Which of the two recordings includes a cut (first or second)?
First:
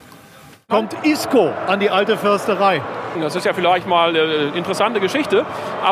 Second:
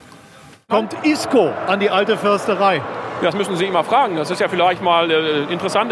first